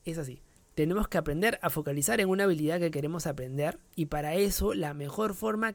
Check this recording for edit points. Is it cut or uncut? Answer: cut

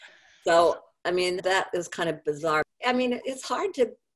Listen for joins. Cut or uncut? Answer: cut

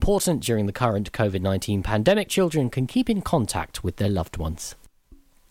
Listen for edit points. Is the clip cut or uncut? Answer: cut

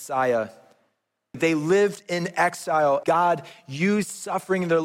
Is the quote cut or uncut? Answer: cut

